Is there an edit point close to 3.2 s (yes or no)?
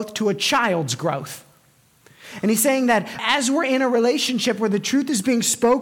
yes